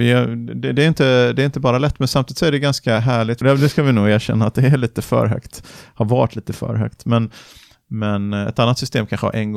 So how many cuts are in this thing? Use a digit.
1